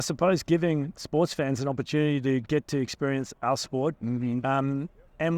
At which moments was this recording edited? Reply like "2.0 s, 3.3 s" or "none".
4.0 s